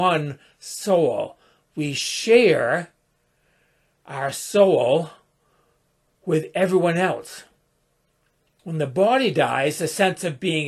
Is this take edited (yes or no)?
no